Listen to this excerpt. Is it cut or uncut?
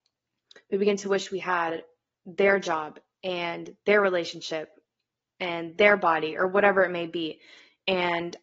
uncut